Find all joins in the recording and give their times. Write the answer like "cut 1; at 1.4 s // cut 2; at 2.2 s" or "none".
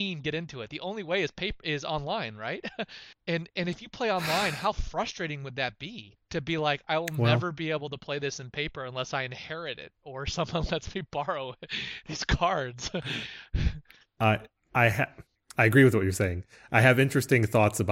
none